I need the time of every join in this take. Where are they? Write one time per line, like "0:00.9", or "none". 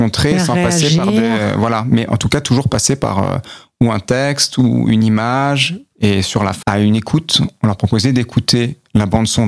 0:06.6